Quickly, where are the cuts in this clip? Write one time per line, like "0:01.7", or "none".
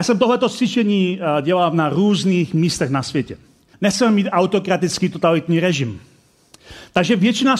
0:03.7

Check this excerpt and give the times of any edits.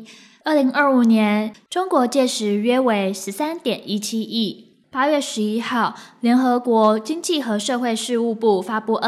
0:01.5
0:04.8

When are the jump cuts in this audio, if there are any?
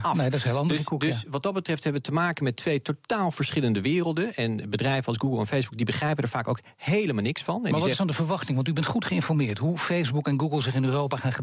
none

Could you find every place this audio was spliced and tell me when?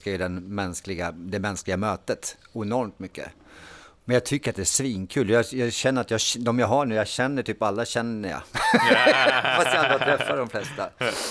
none

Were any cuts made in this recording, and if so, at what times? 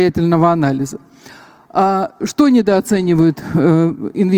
none

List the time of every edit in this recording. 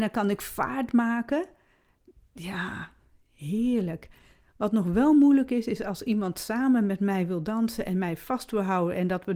none

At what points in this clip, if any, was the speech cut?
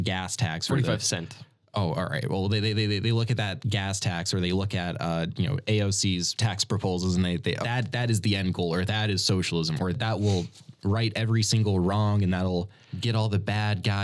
0:07.6

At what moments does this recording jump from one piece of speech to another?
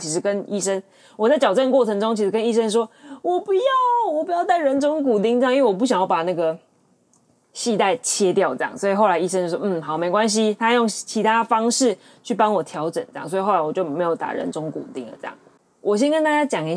none

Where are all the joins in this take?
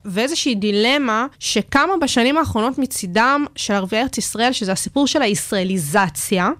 0:01.3

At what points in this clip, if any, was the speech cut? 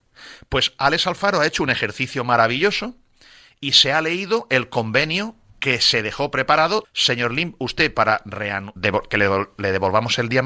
0:06.8
0:08.8

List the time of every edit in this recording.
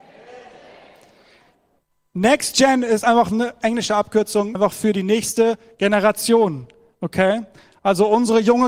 0:04.6

